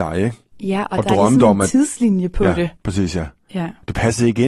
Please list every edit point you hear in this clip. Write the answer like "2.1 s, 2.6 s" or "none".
none